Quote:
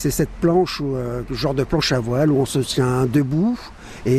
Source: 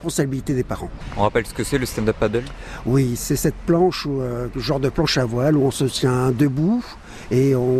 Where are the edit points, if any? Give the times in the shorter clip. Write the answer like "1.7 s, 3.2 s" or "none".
none